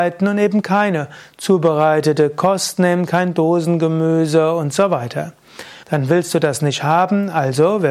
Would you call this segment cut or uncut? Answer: cut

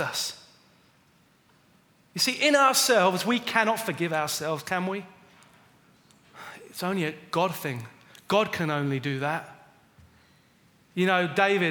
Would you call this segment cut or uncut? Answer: uncut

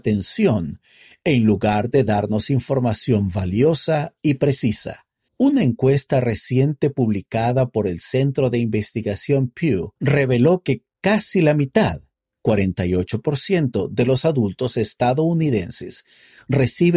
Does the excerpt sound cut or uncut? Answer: cut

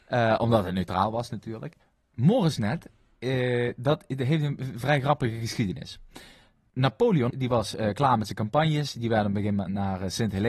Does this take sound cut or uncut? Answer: cut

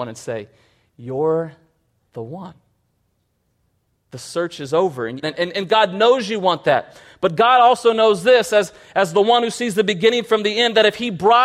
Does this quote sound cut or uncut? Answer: cut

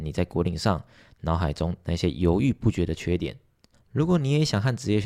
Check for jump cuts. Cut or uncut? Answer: cut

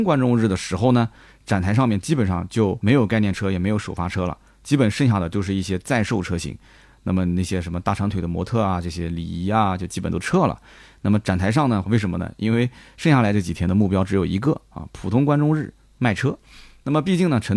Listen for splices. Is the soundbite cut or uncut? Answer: cut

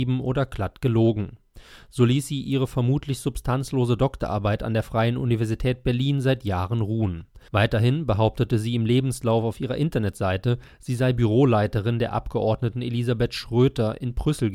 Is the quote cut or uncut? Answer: cut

